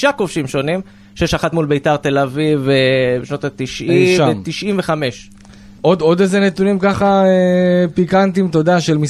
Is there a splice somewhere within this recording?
yes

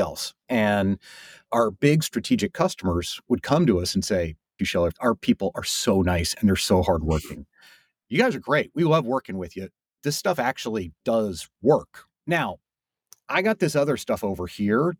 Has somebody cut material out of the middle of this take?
yes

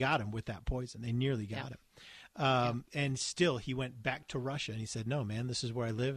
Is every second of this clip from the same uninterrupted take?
yes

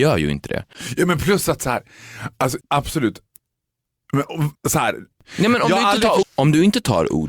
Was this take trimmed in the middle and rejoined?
yes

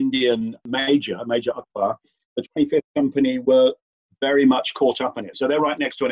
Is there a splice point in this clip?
no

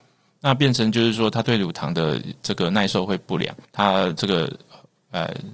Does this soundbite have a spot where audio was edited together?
yes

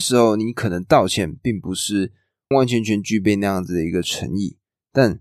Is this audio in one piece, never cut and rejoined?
no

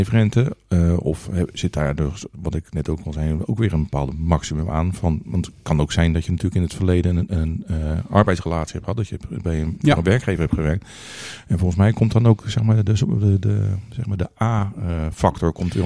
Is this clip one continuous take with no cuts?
yes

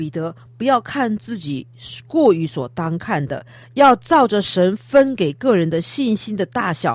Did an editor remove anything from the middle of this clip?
no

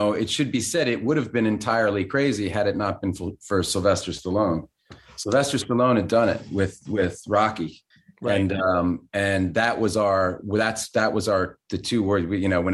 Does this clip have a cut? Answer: no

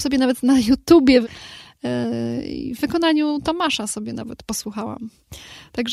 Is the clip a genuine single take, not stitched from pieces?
no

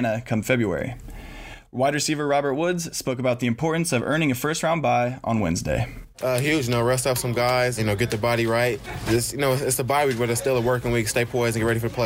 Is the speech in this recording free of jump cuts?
no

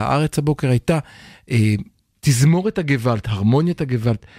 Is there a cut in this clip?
no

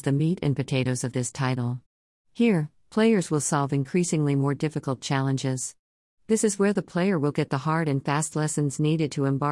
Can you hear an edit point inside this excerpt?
no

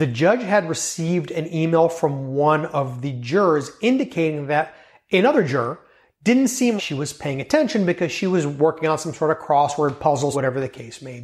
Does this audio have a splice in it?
yes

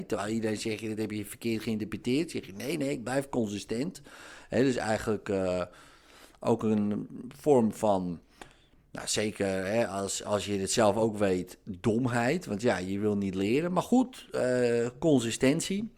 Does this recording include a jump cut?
no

